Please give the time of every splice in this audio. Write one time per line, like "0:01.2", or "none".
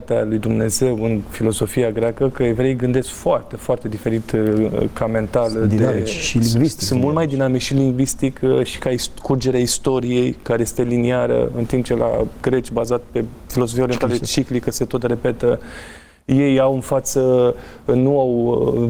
none